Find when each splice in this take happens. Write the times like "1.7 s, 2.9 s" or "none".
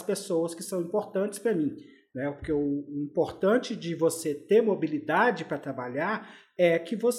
none